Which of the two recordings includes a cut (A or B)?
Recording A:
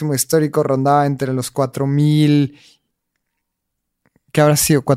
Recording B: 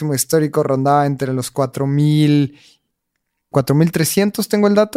B